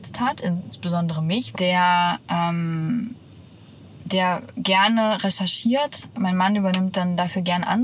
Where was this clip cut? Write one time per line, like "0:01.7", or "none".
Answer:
0:01.5